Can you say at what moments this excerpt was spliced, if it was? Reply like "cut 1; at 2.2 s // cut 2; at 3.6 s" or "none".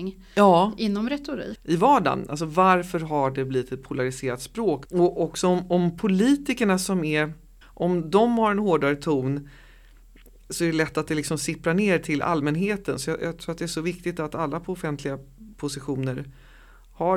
cut 1; at 1.5 s // cut 2; at 4.8 s // cut 3; at 7.6 s

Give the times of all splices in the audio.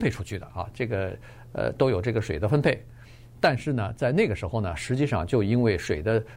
none

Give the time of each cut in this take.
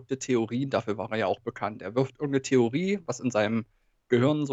none

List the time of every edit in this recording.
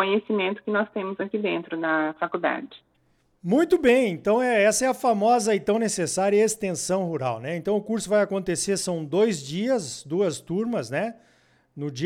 none

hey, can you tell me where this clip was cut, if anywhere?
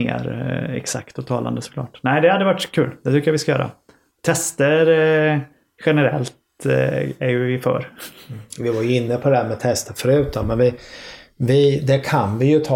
none

